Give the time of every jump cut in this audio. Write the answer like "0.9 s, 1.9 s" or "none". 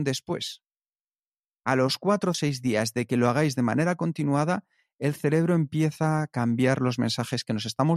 2.3 s